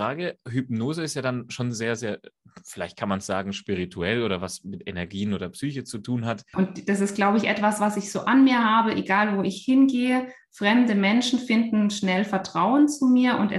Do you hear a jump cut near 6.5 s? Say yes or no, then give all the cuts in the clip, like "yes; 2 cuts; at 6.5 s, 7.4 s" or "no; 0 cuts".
yes; 1 cut; at 6.5 s